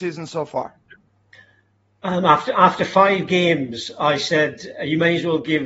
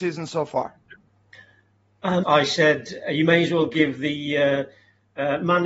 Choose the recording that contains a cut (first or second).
second